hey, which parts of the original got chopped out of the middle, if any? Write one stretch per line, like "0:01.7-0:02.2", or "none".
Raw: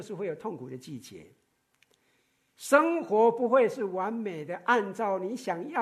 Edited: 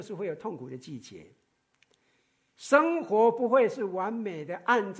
none